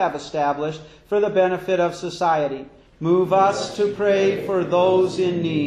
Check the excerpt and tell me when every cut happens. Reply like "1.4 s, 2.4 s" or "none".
2.8 s